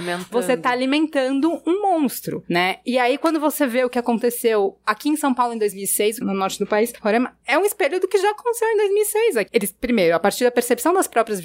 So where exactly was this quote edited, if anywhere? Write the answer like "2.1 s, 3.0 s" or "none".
6.2 s, 9.5 s